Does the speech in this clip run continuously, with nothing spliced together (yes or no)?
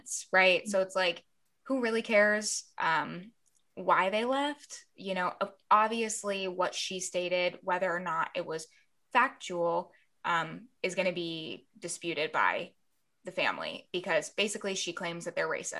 yes